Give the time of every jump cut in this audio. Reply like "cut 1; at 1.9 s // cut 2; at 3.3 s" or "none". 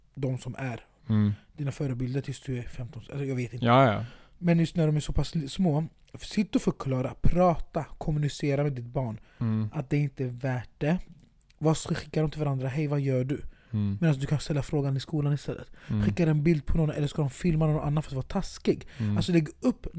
none